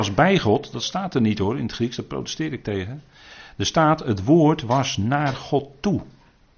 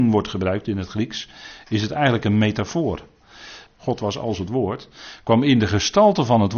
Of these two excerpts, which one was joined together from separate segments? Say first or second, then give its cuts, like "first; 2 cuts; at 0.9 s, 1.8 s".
second; 1 cut; at 3.7 s